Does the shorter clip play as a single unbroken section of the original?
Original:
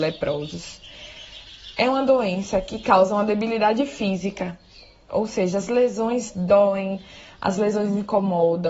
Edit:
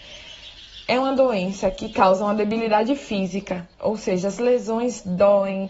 no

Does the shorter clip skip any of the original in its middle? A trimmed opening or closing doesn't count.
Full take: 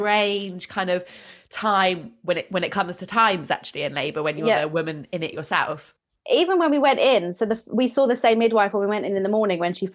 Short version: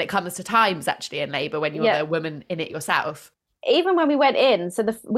no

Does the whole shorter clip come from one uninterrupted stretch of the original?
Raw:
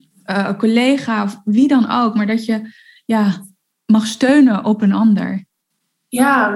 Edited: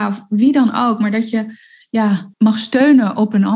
no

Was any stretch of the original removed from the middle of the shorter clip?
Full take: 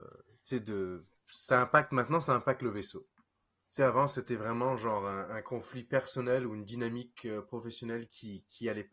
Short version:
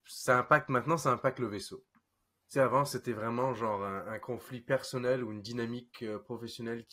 no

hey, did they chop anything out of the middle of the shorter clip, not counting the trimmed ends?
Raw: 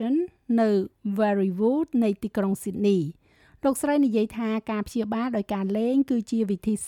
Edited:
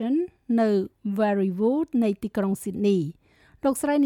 no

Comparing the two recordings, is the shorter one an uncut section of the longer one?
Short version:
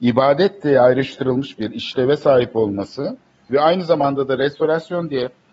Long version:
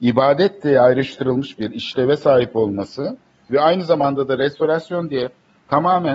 yes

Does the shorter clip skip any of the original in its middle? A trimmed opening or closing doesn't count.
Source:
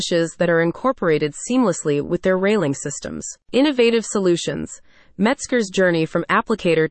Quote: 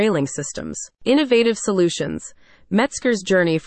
no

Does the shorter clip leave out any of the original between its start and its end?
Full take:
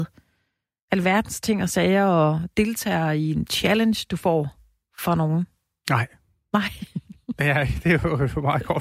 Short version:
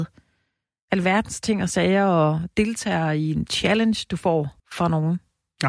yes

